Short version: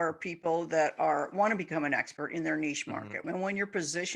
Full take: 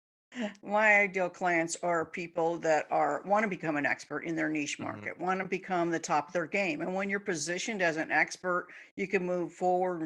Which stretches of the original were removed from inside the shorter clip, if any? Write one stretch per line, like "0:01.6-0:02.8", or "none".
0:05.2-0:06.8